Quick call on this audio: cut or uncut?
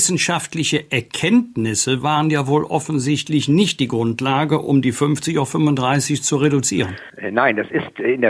uncut